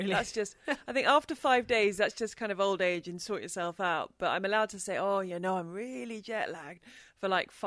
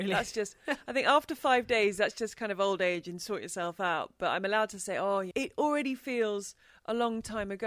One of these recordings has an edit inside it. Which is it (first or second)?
second